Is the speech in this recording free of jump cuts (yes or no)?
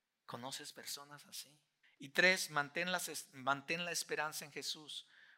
no